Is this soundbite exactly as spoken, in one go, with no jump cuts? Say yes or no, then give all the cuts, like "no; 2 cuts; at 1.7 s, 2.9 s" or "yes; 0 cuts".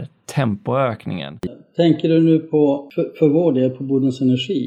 yes; 0 cuts